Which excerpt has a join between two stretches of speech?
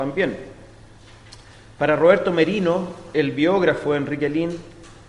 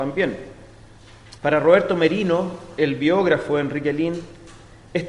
second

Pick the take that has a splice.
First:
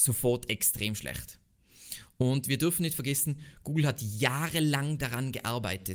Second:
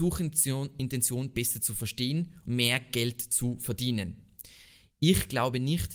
second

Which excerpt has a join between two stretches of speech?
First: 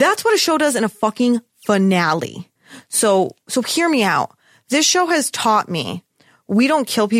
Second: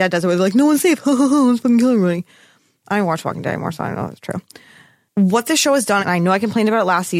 second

